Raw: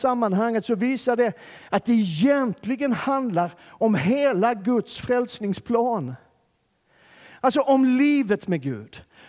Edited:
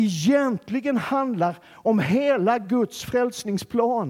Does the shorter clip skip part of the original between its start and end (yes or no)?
no